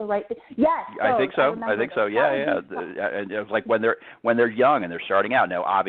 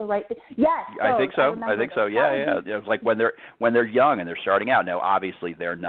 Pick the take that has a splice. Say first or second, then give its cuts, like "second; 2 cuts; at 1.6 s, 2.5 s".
second; 1 cut; at 2.7 s